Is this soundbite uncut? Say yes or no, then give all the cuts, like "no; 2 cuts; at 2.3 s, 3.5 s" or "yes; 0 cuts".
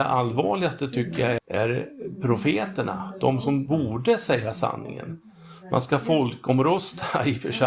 no; 1 cut; at 1.4 s